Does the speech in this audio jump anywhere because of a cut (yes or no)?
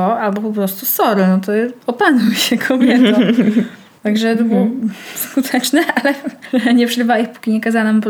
yes